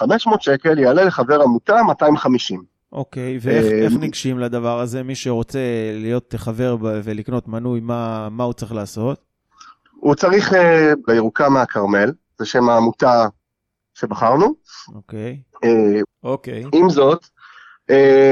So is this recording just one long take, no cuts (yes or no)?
no